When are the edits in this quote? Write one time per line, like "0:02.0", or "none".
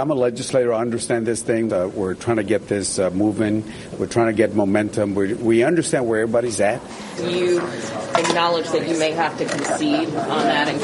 0:01.7
0:07.2